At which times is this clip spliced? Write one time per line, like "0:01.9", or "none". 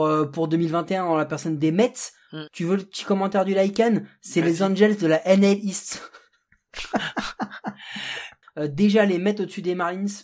0:02.5
0:08.4